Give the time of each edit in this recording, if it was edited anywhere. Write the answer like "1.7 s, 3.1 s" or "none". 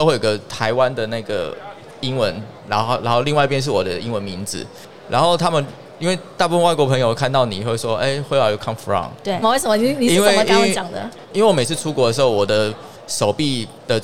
9.4 s